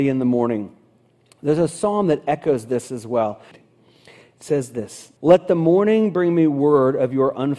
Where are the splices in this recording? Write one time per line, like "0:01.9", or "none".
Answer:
0:03.5
0:05.2